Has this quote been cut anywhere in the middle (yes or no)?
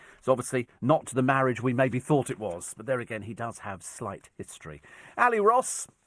no